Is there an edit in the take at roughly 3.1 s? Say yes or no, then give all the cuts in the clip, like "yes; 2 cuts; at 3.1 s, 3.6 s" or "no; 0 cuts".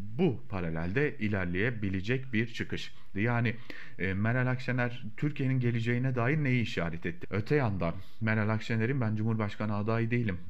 yes; 2 cuts; at 3.1 s, 7.2 s